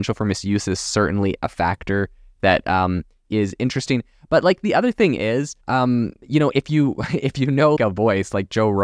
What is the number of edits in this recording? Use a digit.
2